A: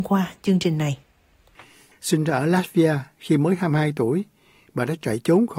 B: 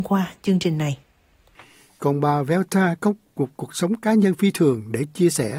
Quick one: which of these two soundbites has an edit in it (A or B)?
A